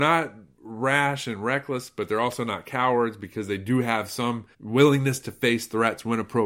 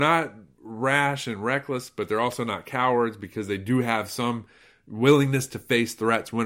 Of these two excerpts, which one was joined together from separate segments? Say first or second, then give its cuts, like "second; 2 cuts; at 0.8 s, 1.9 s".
first; 1 cut; at 4.5 s